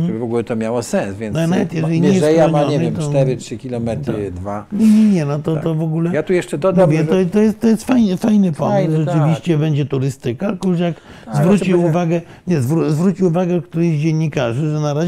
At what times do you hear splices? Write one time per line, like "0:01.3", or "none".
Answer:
none